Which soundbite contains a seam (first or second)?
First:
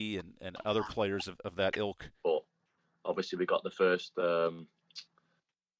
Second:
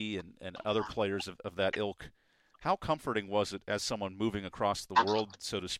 first